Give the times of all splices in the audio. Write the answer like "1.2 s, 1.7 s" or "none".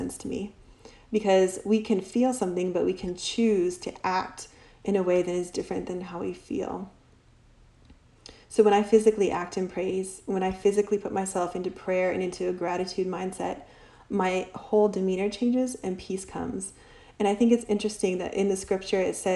none